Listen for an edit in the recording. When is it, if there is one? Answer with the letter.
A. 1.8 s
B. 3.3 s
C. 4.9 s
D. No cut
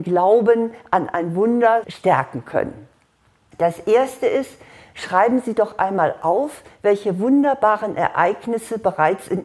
A